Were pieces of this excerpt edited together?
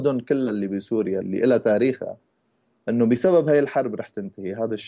yes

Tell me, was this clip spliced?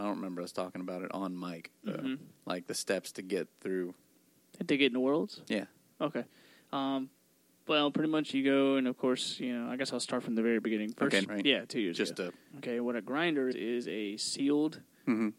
yes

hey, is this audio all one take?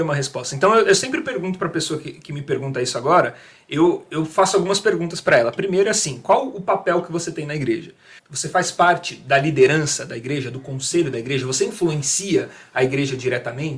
no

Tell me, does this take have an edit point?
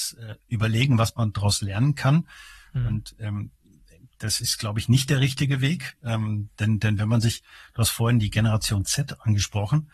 no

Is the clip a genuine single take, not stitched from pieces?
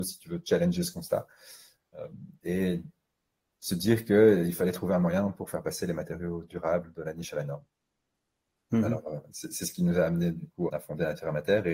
no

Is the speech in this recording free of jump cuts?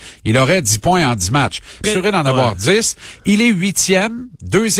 no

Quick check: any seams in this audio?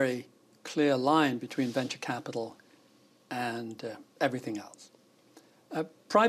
no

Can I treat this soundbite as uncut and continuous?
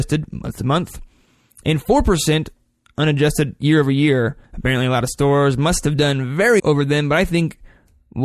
no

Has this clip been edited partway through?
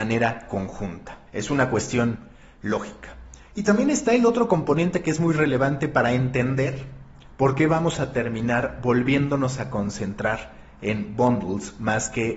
yes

